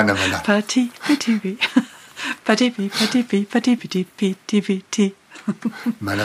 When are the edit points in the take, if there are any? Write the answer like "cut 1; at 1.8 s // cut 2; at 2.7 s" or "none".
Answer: cut 1; at 3.8 s